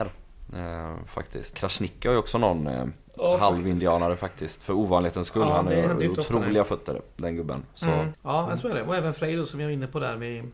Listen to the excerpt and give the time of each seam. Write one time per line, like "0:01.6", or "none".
0:01.5
0:08.1